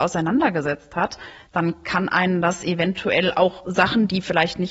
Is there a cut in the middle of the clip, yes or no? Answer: no